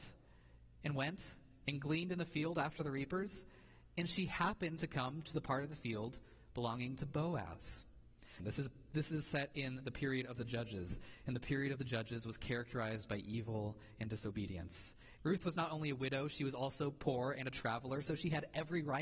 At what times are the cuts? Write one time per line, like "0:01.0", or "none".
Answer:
0:08.4
0:15.2